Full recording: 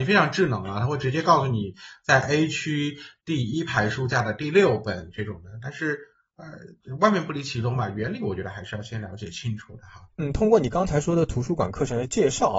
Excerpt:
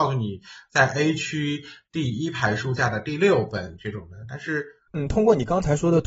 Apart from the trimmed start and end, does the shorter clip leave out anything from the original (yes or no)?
yes